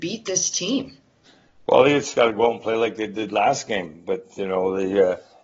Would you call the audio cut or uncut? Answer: uncut